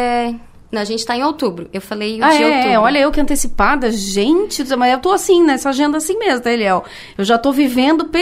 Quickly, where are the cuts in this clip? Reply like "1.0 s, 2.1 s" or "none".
none